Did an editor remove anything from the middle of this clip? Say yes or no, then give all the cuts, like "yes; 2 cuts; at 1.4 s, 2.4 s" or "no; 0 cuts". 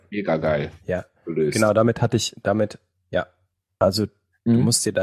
yes; 1 cut; at 3.8 s